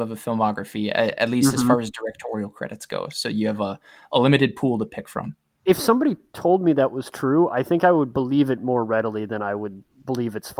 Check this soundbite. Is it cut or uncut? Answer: uncut